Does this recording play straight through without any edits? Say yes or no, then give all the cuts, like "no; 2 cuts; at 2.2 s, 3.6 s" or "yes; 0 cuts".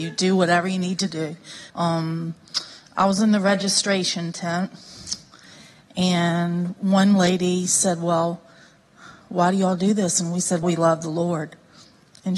no; 2 cuts; at 1.7 s, 10.6 s